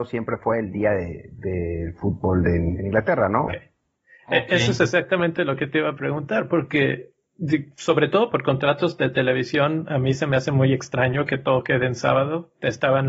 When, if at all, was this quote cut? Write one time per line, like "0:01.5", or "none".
0:03.5